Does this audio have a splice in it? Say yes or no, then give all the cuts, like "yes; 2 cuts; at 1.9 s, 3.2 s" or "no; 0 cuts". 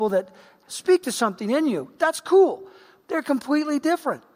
yes; 1 cut; at 3.0 s